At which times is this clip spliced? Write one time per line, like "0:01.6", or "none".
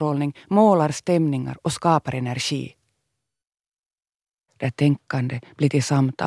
0:04.5